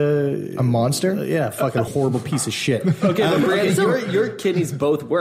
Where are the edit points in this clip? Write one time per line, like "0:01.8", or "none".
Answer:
0:01.9

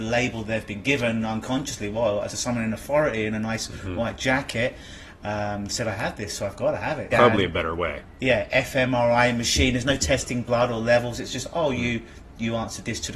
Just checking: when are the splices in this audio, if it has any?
0:02.3
0:07.1

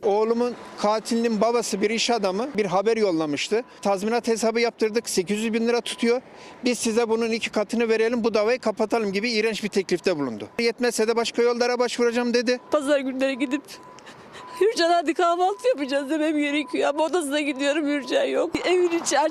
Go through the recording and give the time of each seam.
none

